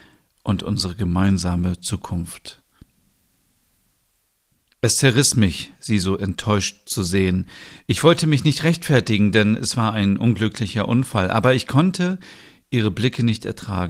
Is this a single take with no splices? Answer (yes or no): yes